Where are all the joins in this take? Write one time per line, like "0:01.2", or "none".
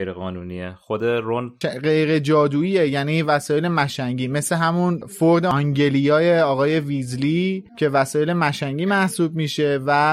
0:01.6
0:07.7